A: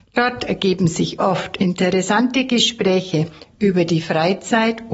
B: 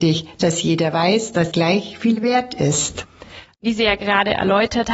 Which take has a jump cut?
B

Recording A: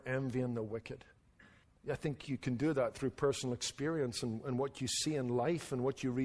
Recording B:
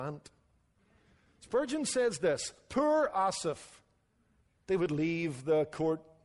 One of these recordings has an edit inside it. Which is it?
B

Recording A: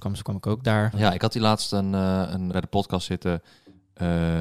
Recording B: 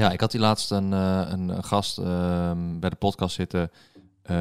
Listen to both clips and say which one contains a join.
A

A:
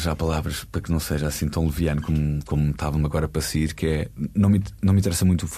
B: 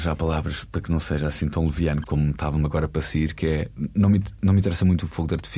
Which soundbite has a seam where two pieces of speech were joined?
B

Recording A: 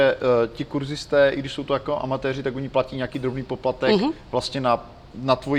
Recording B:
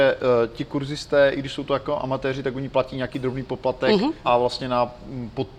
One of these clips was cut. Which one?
B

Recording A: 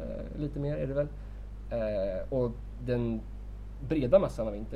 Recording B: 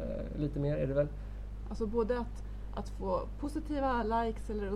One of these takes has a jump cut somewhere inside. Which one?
B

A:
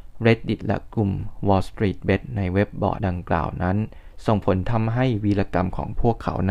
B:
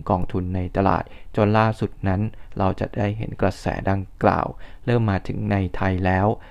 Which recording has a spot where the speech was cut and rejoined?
A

